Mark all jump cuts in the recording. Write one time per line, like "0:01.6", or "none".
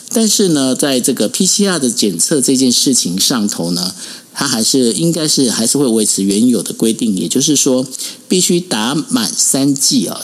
0:01.3